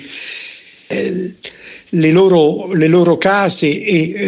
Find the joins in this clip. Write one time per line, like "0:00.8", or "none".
0:00.9